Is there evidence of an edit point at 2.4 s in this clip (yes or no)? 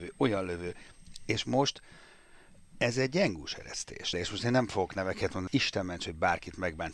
no